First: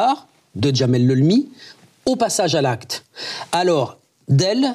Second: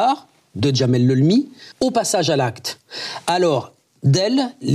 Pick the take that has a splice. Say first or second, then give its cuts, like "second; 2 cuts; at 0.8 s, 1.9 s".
second; 1 cut; at 1.7 s